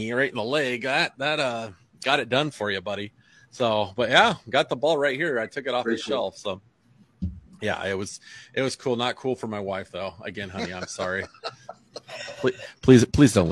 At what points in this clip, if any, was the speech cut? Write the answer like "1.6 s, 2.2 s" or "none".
none